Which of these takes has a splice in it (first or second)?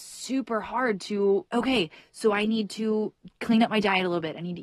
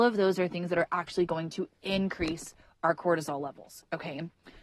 first